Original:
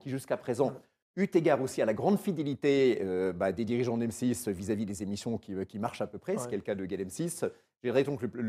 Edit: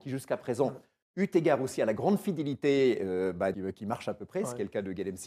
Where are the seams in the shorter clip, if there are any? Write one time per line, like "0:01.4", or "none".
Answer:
0:03.5